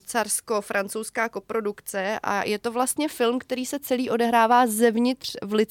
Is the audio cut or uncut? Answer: uncut